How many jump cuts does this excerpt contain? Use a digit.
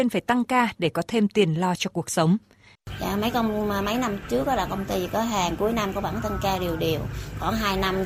1